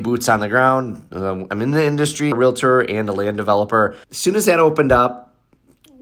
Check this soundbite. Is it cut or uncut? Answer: cut